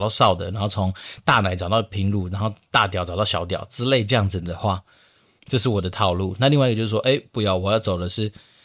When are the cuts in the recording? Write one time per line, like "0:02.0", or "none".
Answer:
none